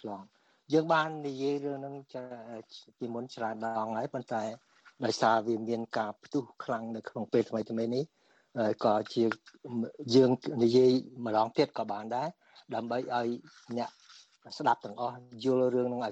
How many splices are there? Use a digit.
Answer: 0